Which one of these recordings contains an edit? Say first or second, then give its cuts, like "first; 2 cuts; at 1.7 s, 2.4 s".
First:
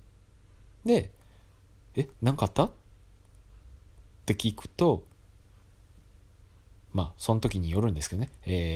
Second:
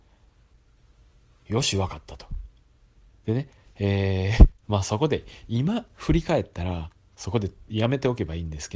second; 2 cuts; at 3.1 s, 4.6 s